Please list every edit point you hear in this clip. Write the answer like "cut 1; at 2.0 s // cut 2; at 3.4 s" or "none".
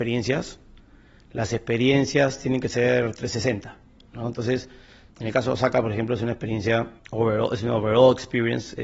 cut 1; at 5.1 s // cut 2; at 7.0 s